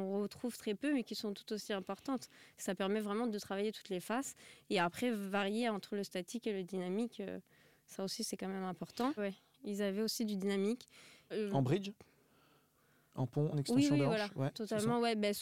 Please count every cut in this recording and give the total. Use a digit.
3